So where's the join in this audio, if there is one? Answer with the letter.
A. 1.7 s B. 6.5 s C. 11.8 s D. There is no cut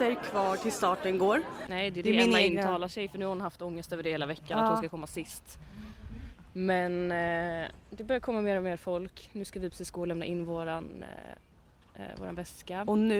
A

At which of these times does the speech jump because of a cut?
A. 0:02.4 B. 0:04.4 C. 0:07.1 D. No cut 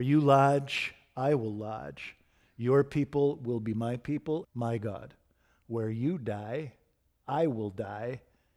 B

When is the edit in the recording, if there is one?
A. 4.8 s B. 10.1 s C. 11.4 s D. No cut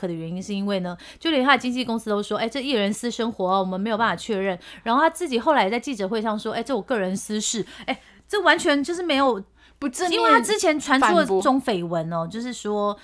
C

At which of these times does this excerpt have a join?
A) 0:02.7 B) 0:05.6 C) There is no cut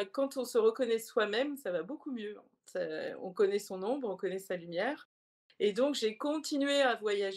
C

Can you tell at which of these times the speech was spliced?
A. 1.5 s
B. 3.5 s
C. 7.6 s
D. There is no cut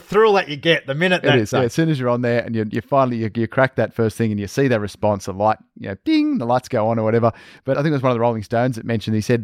A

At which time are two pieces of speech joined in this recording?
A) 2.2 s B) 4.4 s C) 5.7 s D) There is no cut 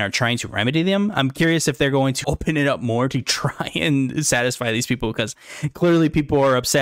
A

